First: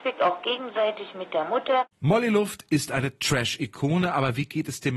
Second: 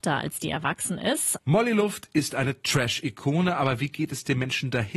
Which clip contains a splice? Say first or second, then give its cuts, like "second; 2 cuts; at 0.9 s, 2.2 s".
second; 1 cut; at 1.4 s